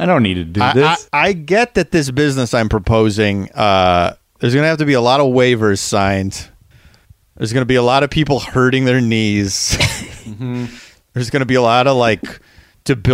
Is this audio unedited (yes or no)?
yes